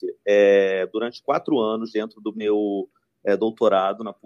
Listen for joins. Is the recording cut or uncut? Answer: uncut